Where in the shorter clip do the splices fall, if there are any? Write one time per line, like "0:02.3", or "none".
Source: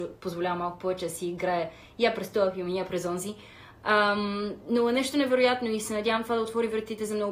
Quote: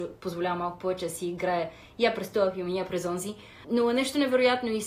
0:03.6